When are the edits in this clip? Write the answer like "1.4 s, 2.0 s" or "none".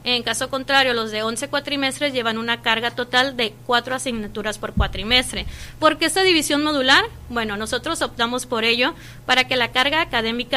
5.8 s